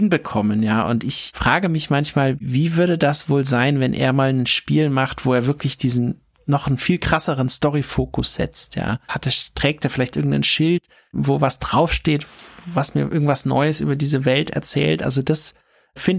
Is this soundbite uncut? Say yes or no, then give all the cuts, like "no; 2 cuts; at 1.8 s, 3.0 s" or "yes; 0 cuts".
no; 1 cut; at 9.1 s